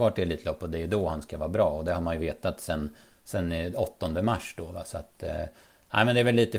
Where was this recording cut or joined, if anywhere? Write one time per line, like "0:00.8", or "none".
none